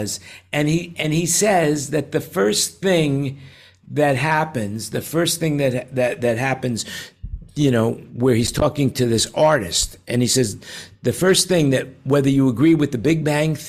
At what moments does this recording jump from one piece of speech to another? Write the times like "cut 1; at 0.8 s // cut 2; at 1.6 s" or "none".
cut 1; at 0.9 s